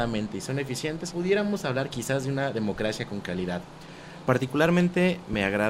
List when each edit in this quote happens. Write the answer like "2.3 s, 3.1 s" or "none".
1.1 s, 4.3 s